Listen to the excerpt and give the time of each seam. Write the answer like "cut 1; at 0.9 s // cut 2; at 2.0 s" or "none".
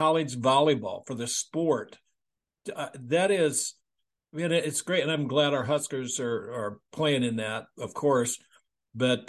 none